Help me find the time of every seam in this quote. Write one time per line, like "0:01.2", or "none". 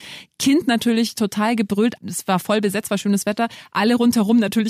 0:02.0